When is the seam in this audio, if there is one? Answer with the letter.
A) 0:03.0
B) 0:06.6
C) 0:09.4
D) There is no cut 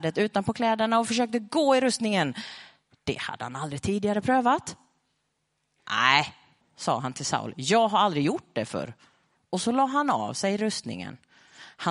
B